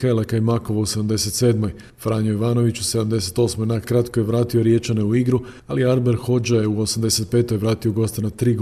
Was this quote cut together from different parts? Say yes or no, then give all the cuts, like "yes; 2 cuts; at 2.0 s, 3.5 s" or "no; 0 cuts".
no; 0 cuts